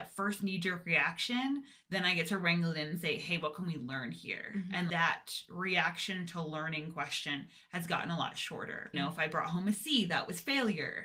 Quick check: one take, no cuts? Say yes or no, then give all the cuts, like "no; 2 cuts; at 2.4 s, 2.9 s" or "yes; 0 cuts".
no; 2 cuts; at 4.9 s, 8.9 s